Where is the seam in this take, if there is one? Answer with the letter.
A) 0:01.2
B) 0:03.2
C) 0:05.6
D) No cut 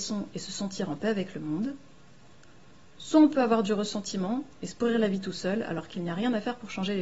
D